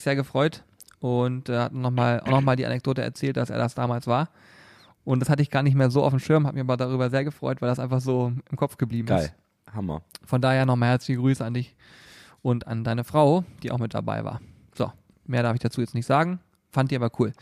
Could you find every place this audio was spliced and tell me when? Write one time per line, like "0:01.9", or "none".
none